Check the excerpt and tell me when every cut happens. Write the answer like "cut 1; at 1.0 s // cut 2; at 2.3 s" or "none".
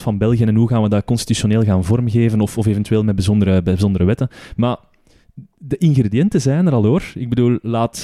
none